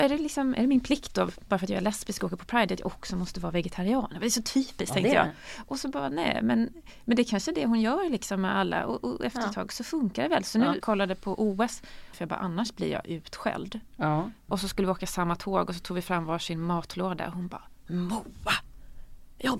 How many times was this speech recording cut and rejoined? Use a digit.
3